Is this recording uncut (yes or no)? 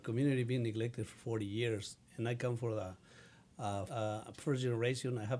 no